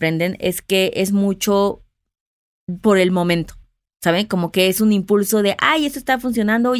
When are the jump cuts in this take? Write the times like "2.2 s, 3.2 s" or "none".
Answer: none